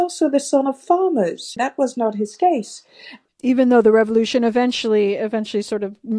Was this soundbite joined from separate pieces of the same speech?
yes; 2 cuts; at 1.6 s, 3.3 s

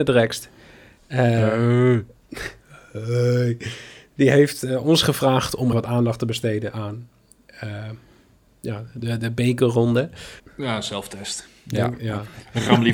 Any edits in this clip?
yes; 2 cuts; at 5.7 s, 10.4 s

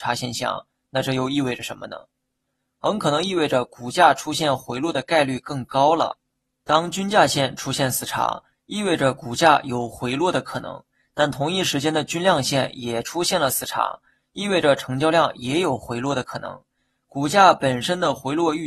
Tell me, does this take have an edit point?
no; 0 cuts

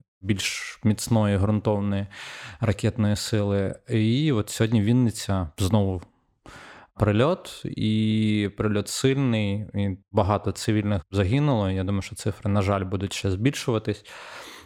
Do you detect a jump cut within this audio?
no; 0 cuts

